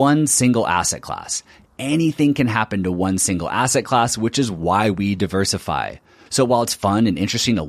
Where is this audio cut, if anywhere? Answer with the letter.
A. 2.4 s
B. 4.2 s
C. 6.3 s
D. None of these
C